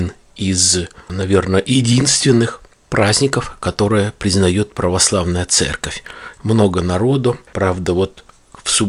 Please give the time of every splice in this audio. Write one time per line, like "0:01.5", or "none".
0:06.4
0:07.5